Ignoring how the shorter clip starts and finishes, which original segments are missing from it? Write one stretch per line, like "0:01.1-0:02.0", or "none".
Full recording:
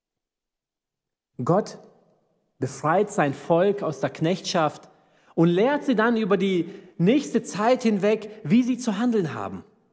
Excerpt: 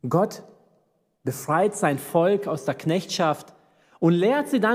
none